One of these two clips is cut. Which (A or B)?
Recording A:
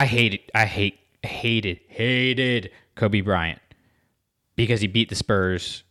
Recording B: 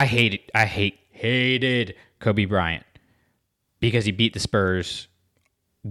B